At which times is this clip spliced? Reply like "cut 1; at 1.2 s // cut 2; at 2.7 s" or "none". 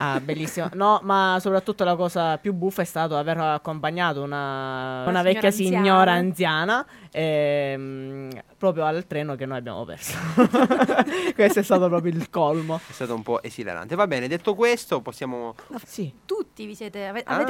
cut 1; at 15.8 s